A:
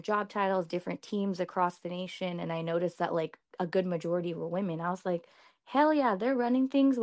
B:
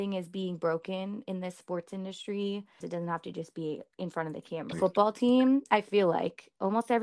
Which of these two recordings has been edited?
B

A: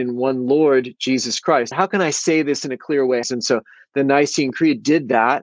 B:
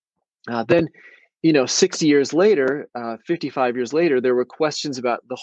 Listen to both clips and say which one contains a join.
A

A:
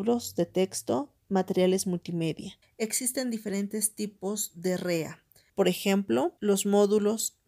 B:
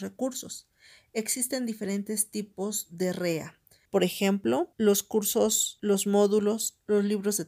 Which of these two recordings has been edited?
A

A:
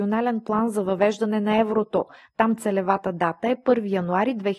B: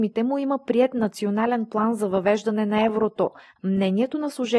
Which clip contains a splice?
B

